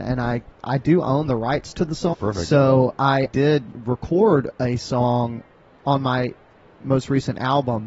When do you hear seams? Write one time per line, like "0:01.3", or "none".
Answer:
0:02.1
0:03.3